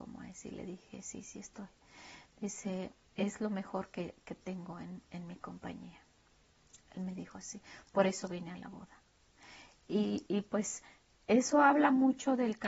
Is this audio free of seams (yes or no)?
yes